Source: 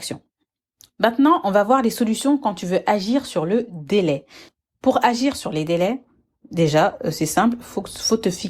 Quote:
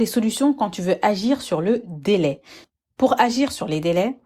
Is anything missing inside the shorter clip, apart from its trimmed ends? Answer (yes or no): no